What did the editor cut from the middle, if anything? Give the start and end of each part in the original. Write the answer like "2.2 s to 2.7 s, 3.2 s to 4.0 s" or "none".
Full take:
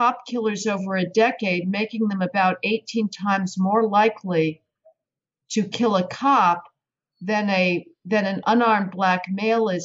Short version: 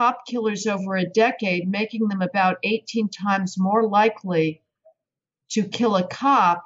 none